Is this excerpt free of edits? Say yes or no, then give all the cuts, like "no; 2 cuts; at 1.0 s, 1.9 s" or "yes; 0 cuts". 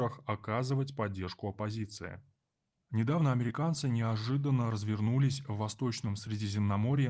no; 1 cut; at 2.9 s